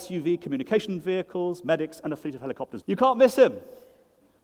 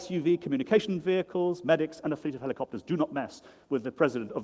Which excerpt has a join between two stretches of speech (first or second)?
first